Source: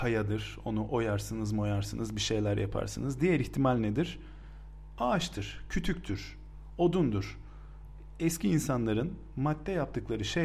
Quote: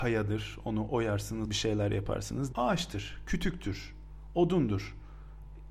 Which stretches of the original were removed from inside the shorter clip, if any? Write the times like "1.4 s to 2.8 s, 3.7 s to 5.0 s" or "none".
1.5 s to 2.1 s, 3.2 s to 5.0 s